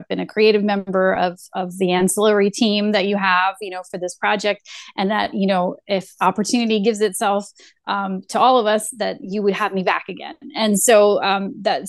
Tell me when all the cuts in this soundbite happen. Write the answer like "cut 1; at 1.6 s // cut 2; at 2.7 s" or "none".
none